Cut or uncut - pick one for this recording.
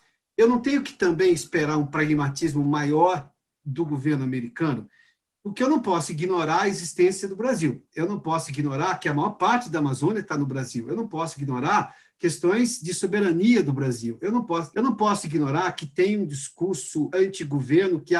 cut